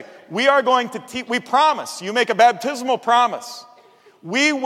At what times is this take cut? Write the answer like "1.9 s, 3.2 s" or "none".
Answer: none